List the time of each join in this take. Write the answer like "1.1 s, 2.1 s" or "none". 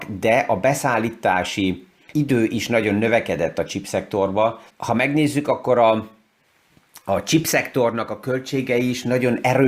2.1 s, 4.7 s